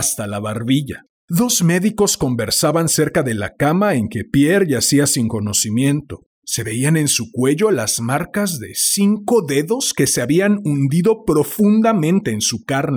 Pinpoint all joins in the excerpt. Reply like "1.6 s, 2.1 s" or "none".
1.2 s, 6.3 s

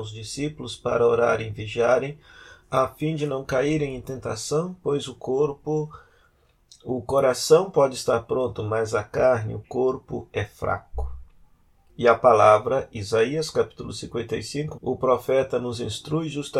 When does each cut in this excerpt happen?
11.9 s, 14.8 s

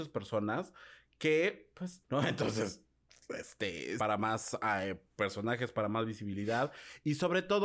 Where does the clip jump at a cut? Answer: 2.0 s, 4.0 s

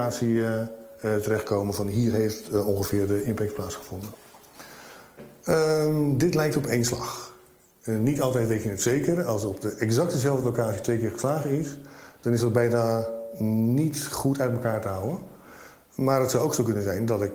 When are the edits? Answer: none

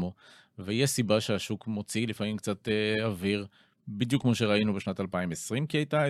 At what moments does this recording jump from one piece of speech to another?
none

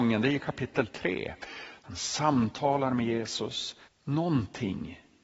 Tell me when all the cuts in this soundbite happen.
1.8 s, 3.8 s

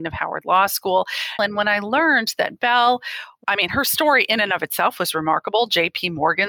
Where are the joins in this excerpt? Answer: 1.4 s

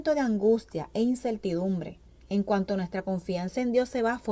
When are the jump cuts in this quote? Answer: none

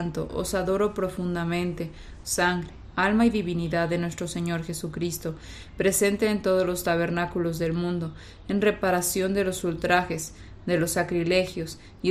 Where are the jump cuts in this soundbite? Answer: 2.2 s

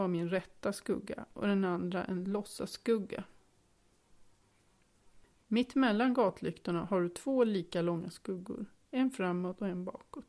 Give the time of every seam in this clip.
5.3 s

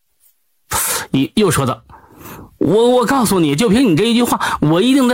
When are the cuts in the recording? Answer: none

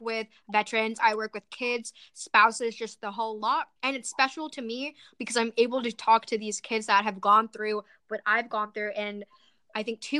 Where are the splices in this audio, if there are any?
1.0 s, 3.8 s

